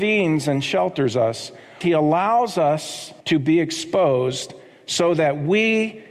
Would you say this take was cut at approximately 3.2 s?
yes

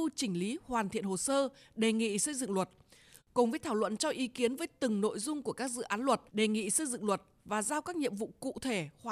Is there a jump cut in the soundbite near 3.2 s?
yes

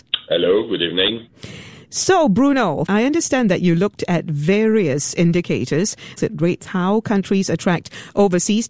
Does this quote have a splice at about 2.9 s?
yes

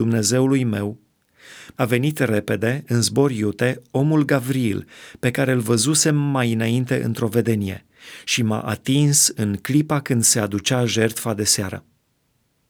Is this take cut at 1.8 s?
yes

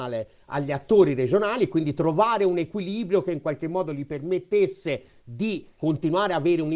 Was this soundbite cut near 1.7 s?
no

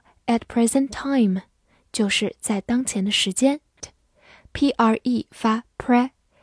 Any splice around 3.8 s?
yes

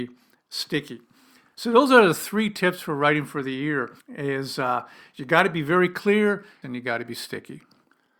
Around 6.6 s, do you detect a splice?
yes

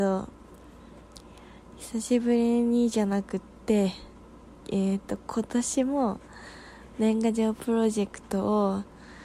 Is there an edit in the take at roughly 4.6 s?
yes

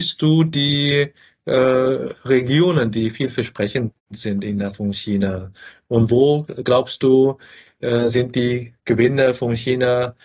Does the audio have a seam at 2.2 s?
no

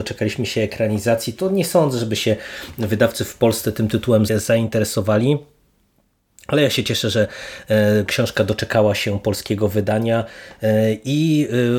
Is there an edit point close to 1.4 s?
no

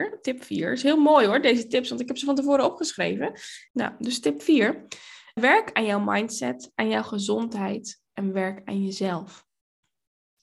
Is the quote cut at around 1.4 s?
no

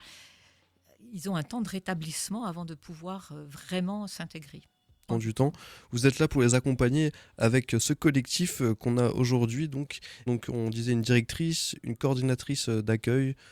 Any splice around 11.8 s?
no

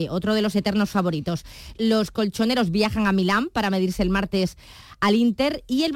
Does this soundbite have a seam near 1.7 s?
yes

